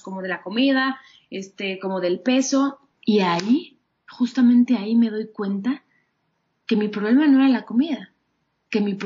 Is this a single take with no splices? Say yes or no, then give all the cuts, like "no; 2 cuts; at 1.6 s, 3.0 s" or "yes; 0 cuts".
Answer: no; 1 cut; at 2.9 s